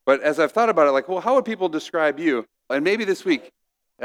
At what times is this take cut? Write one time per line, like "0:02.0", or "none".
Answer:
0:02.7